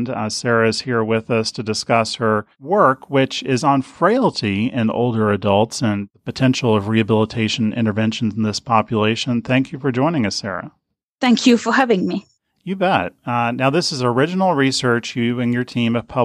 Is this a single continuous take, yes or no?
yes